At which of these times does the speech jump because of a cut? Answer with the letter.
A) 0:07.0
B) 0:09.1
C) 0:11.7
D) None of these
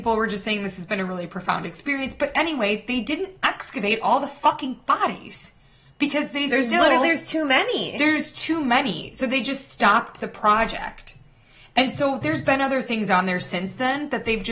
D